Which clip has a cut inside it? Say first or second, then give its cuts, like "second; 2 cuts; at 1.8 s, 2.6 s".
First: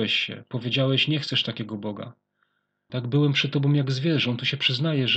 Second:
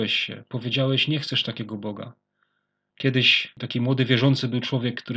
first; 1 cut; at 2.9 s